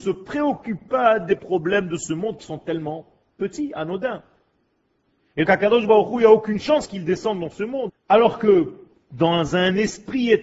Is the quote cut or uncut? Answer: cut